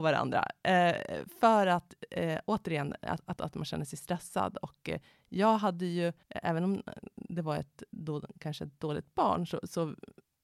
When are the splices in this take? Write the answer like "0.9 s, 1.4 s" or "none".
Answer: 3.4 s, 6.2 s